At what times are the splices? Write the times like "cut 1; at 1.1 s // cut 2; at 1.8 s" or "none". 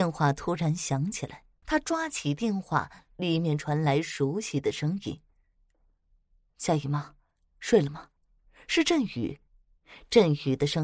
cut 1; at 1.6 s // cut 2; at 8.2 s